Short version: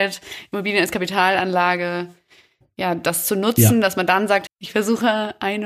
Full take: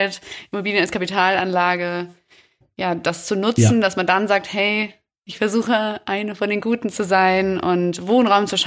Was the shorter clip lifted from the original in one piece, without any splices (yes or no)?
no